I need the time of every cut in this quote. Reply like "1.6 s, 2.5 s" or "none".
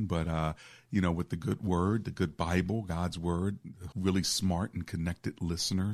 3.9 s